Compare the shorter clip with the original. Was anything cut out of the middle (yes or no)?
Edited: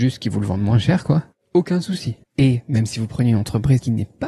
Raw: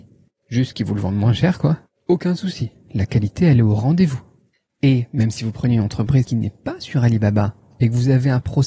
yes